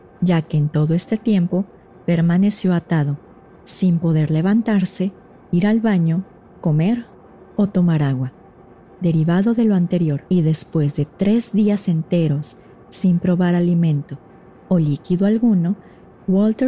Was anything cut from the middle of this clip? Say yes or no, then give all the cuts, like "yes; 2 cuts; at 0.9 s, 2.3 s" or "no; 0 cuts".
yes; 1 cut; at 10.3 s